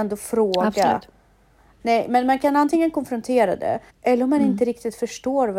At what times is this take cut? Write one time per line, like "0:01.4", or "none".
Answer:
0:01.8
0:03.9